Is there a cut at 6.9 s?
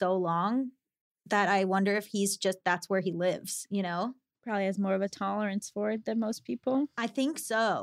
no; 0 cuts

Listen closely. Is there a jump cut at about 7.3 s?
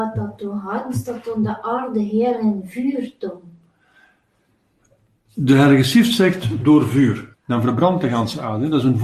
yes; 1 cut; at 7.3 s

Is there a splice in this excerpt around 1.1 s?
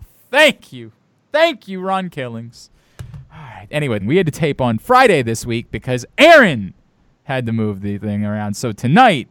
no; 1 cut; at 4.0 s

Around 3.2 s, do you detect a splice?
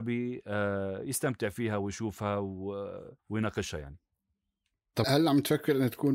yes; 2 cuts; at 3.2 s, 5.0 s

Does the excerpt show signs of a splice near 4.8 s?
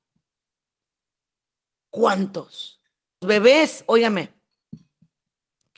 no; 2 cuts; at 1.7 s, 3.2 s

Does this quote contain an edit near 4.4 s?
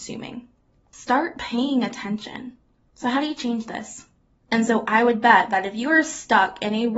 yes; 2 cuts; at 2.8 s, 4.4 s

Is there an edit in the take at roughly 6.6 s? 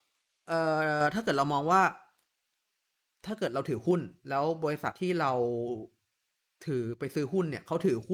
no; 1 cut; at 4.9 s

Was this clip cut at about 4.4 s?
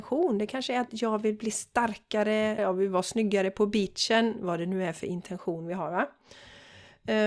no; 1 cut; at 2.6 s

